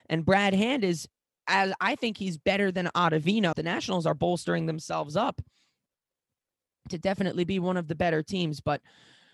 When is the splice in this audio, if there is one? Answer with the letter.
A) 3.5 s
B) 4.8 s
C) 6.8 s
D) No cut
A